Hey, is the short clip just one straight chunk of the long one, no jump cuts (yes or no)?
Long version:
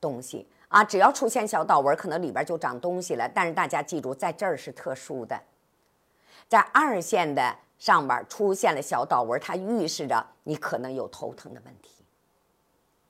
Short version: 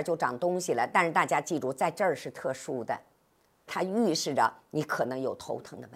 no